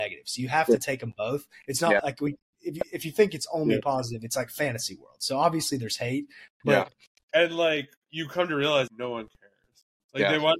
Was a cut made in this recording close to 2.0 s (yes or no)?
no